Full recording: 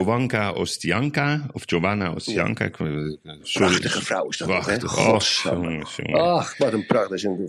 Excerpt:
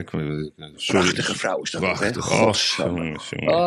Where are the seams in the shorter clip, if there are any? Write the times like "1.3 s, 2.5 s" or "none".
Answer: none